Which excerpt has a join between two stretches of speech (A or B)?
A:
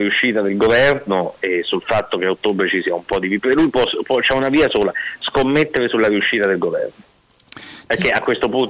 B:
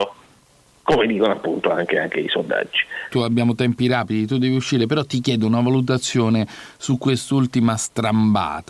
B